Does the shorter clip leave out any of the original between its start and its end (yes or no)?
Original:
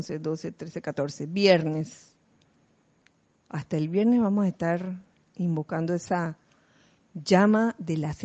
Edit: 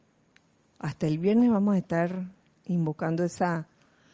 no